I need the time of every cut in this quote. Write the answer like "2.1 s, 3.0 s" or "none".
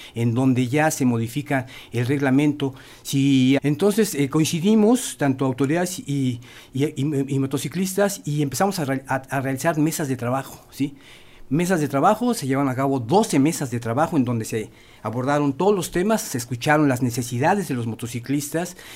3.6 s